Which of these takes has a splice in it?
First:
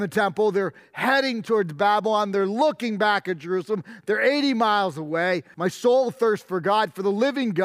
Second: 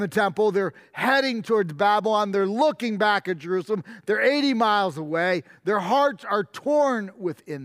first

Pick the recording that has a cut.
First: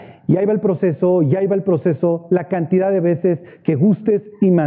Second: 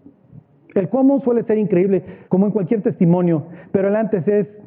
second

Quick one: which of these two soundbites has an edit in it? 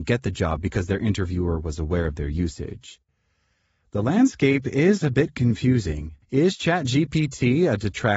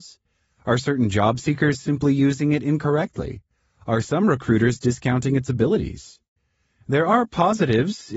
first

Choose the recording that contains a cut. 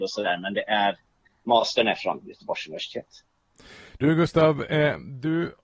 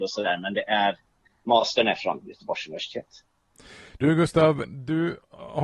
second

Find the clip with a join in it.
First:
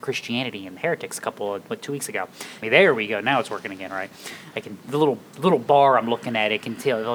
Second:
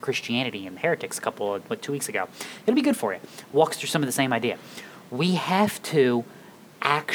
first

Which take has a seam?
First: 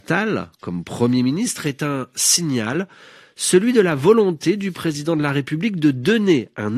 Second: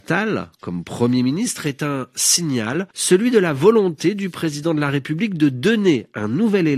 second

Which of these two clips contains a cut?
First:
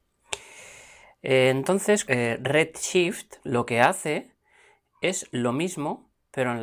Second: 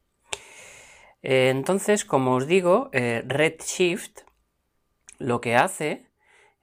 first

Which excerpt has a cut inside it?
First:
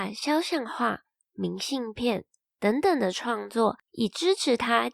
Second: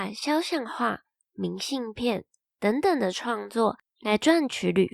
first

